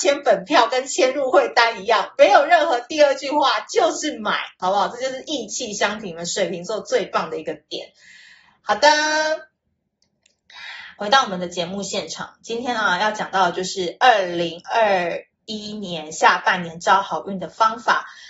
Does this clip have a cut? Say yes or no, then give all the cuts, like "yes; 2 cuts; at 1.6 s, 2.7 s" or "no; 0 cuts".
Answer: no; 0 cuts